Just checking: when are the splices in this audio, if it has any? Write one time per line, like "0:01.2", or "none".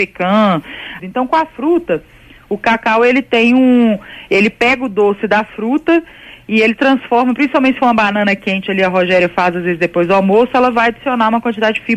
0:01.0